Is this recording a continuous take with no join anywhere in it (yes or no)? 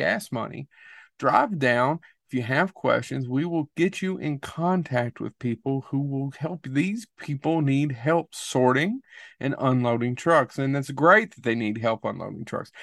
yes